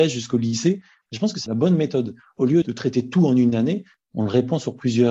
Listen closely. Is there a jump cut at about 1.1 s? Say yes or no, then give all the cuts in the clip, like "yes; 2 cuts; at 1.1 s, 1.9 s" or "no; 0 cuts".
yes; 1 cut; at 1.1 s